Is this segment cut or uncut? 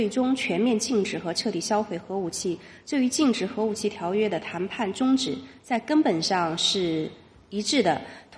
uncut